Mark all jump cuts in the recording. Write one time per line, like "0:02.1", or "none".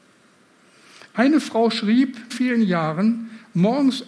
0:02.3